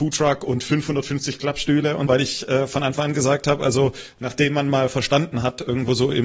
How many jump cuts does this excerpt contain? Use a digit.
1